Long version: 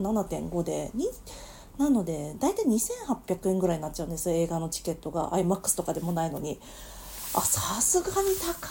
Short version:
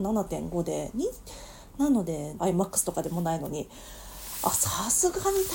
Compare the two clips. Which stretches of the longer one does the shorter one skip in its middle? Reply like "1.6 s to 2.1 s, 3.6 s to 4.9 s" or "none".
2.4 s to 5.3 s